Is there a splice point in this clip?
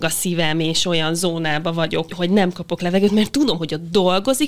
yes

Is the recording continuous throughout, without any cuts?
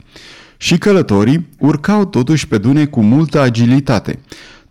no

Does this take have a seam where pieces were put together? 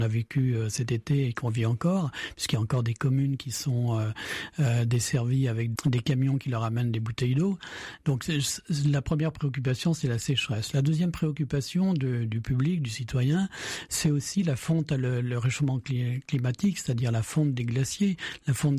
yes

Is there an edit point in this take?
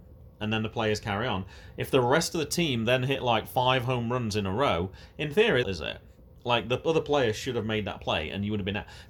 yes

